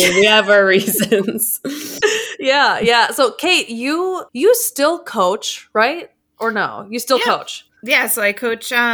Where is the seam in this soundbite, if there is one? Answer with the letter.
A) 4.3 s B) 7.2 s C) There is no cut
A